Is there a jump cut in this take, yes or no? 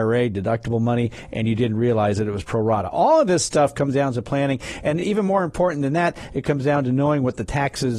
no